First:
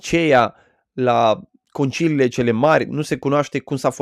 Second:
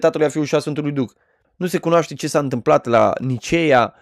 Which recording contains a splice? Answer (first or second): second